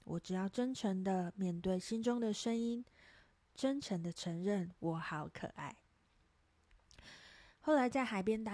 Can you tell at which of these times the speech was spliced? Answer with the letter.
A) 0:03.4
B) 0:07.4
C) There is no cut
C